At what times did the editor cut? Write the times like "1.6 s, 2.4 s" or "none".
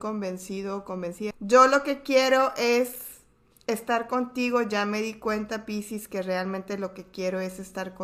1.3 s

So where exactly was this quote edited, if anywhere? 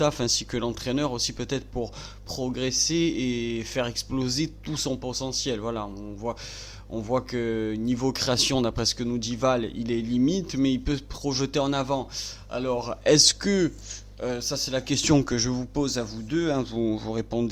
none

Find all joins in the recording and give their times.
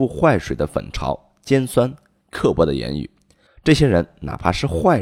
3.5 s

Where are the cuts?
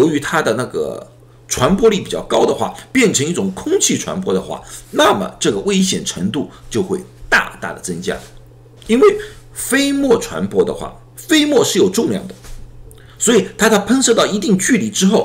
8.8 s, 11.1 s

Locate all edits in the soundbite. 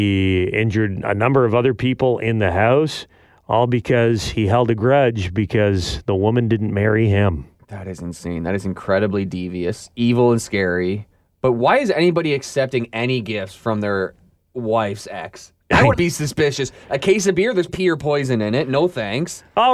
15.9 s, 17.7 s

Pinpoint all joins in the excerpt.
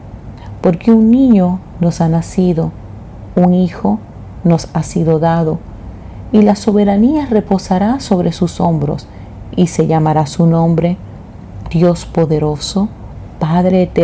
11.6 s

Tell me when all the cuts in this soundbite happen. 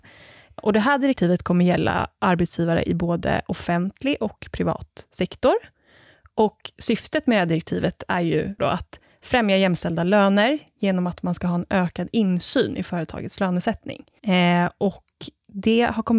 8.6 s, 14.2 s

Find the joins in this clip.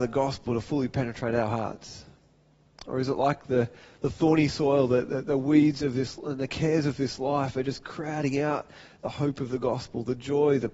none

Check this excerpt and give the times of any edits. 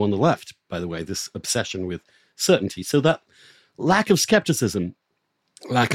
none

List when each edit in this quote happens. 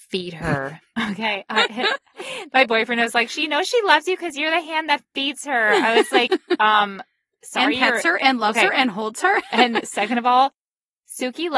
9.5 s

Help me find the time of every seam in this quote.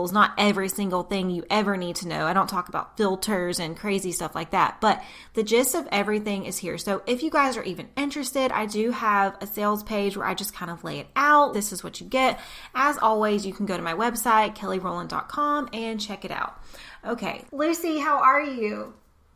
11.5 s, 17.5 s

